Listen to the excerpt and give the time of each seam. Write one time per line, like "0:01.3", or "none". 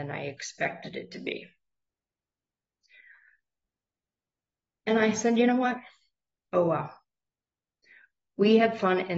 none